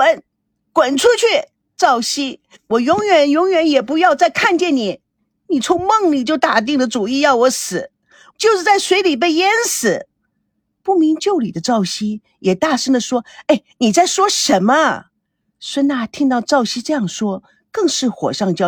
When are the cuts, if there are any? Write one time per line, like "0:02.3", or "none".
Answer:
0:08.3